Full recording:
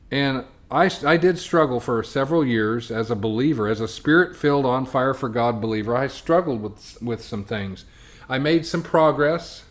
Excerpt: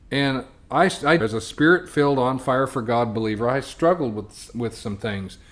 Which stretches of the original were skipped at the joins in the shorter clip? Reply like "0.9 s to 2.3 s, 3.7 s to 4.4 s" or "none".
1.2 s to 3.7 s